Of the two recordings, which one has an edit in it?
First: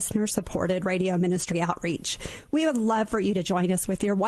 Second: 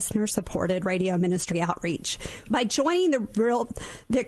second; 1 cut; at 2.4 s

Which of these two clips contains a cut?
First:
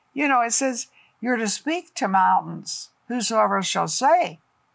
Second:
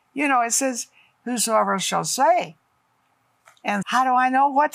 second; 2 cuts; at 1.2 s, 3.8 s

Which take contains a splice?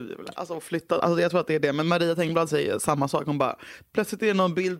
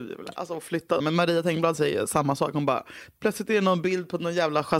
second; 1 cut; at 1.0 s

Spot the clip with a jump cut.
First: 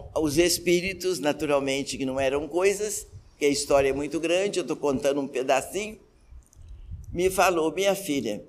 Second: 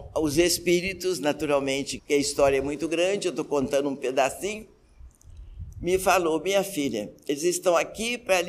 second; 1 cut; at 2.0 s

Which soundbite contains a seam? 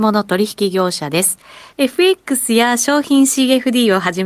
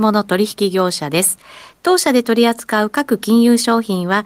first; 1 cut; at 1.7 s

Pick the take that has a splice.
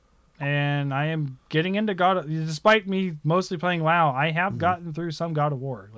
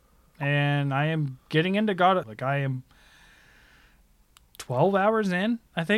second; 1 cut; at 2.2 s

